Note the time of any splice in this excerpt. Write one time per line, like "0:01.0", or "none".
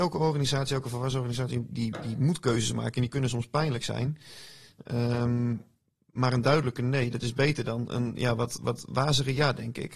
0:01.7